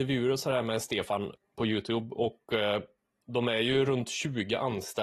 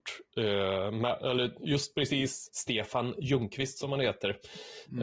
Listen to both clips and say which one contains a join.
second; 1 cut; at 2.5 s

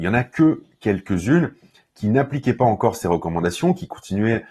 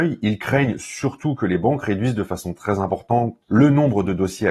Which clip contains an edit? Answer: second; 1 cut; at 3.4 s

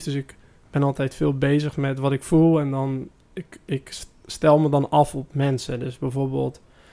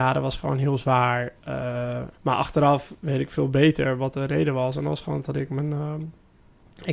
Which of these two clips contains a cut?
second; 1 cut; at 2.1 s

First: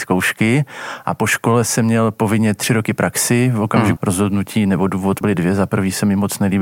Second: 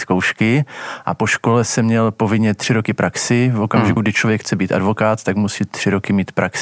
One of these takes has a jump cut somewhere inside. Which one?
first; 2 cuts; at 4.0 s, 5.2 s

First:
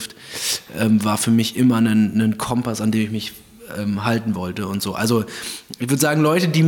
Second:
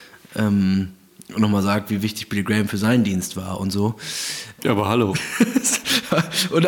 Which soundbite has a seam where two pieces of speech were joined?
second; 1 cut; at 4.6 s

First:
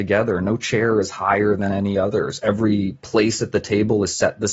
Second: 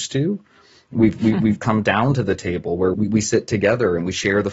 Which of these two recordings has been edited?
second; 1 cut; at 2.9 s

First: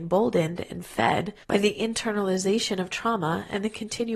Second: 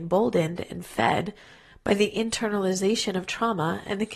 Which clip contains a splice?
first; 1 cut; at 1.4 s

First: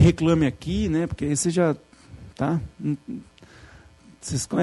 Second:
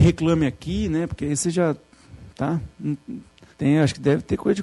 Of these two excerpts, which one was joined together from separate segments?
second; 1 cut; at 3.5 s

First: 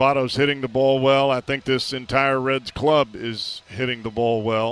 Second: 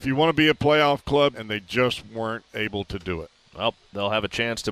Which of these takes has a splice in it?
second; 1 cut; at 1.3 s

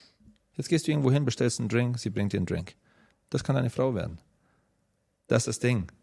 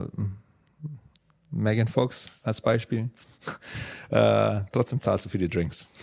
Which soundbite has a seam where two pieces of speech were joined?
first; 1 cut; at 3.1 s

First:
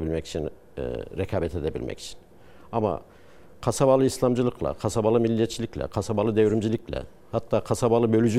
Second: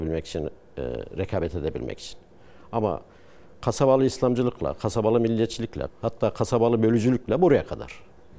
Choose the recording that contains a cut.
second; 1 cut; at 5.9 s

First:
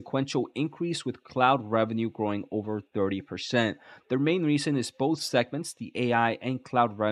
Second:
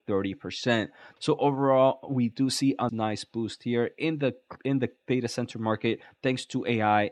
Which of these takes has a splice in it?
second; 2 cuts; at 1.2 s, 2.9 s

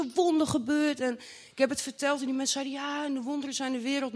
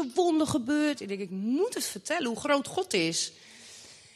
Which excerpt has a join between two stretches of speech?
second; 1 cut; at 1.0 s

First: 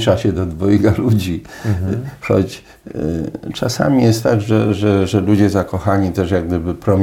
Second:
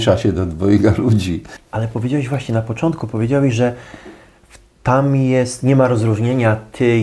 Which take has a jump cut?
second; 1 cut; at 1.6 s

